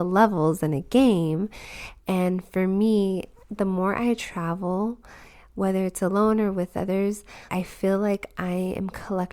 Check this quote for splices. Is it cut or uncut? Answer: cut